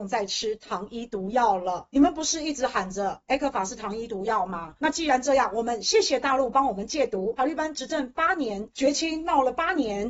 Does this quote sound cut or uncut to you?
uncut